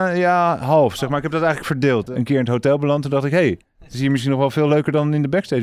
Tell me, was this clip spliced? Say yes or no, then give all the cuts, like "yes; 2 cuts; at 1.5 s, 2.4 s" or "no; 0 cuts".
no; 0 cuts